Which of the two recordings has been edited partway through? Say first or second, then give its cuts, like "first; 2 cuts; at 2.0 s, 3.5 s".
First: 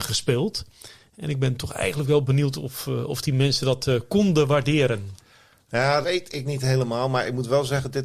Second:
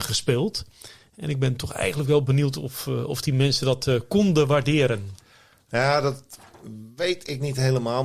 first; 1 cut; at 6.0 s